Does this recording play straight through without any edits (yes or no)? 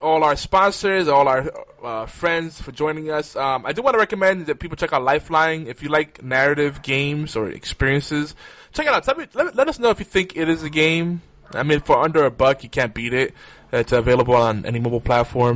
yes